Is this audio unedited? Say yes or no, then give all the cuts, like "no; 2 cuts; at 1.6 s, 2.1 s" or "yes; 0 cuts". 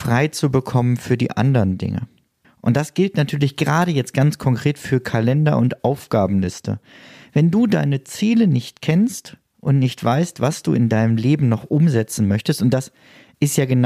no; 1 cut; at 2.4 s